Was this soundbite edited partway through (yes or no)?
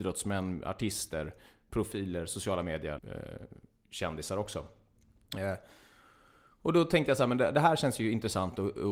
yes